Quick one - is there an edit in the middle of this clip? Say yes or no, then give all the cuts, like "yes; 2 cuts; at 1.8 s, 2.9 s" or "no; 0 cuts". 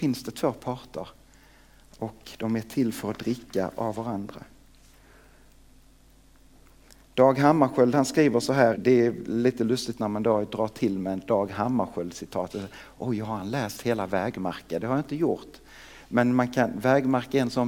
yes; 1 cut; at 8.7 s